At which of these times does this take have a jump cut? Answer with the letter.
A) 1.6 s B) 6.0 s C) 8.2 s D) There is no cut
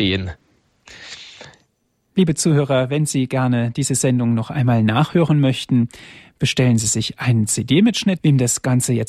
C